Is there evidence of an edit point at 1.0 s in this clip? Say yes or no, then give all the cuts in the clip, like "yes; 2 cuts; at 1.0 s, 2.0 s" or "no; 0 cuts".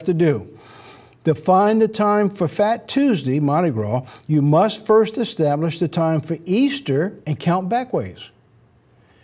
no; 1 cut; at 7.2 s